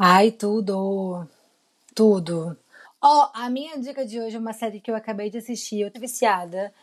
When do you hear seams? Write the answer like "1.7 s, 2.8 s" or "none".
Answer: 2.8 s, 5.9 s

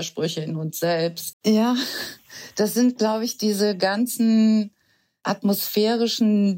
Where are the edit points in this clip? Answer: 1.3 s

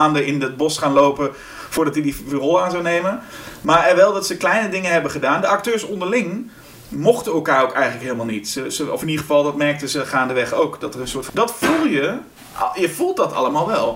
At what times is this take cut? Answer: 11.3 s

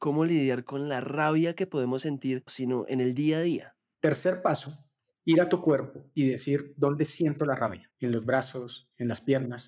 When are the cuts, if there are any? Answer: 2.5 s, 3.9 s, 7.9 s

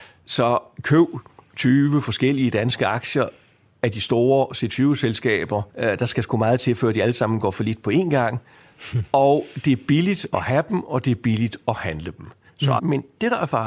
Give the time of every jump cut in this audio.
5.7 s, 12.8 s

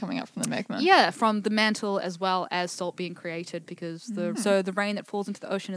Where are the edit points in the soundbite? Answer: 4.3 s

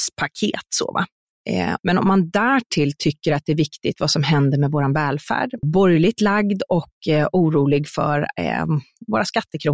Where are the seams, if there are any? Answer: 1.8 s, 5.6 s

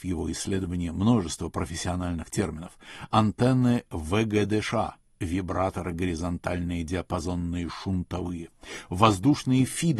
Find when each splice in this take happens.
none

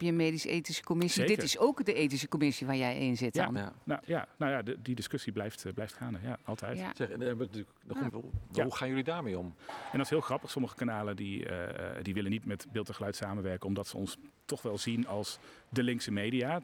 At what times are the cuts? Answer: 8.1 s, 9.6 s, 12.4 s

